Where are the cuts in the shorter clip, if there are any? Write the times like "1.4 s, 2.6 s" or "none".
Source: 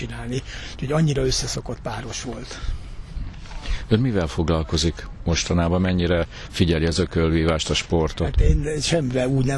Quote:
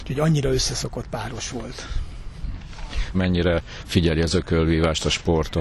3.1 s